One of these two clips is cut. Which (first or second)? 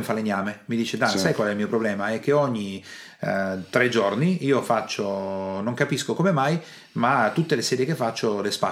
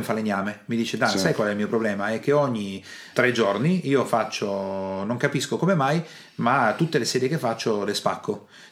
second